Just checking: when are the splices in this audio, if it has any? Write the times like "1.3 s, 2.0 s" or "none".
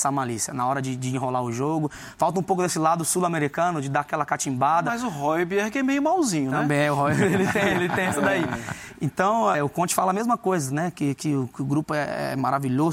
9.5 s